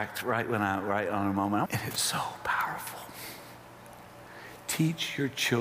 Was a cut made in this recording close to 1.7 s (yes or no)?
yes